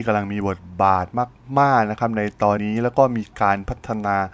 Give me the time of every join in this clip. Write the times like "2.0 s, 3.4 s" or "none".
2.6 s